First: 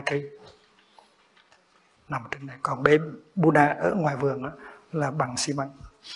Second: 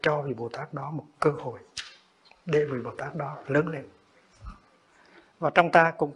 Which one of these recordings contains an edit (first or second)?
first